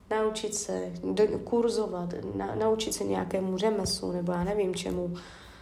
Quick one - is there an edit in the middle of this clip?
no; 0 cuts

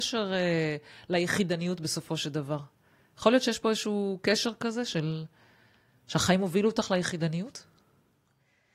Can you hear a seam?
no; 0 cuts

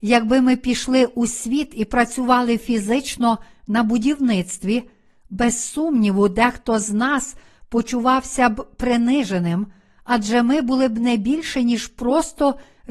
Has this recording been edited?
no; 0 cuts

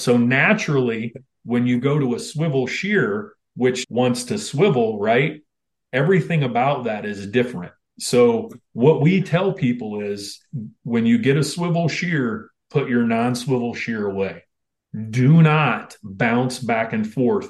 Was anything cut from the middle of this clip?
yes; 1 cut; at 3.8 s

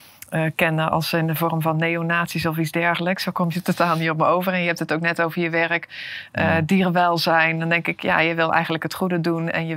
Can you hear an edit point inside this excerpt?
no; 0 cuts

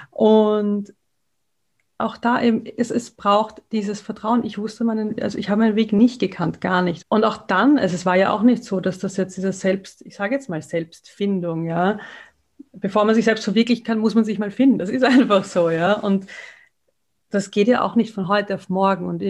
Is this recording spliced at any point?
yes; 1 cut; at 7.0 s

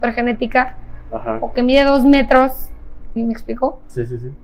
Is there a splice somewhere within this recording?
yes; 1 cut; at 3.2 s

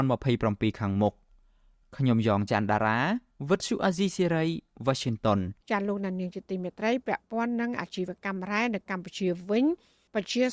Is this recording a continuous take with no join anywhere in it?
no; 1 cut; at 5.6 s

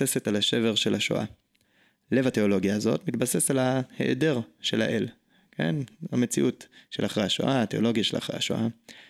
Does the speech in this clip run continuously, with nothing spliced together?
yes; 0 cuts

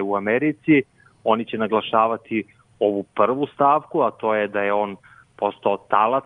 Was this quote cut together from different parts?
no; 0 cuts

